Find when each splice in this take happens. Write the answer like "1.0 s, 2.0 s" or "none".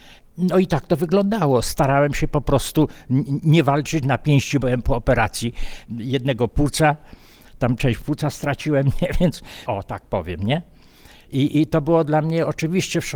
4.6 s, 9.7 s, 11.5 s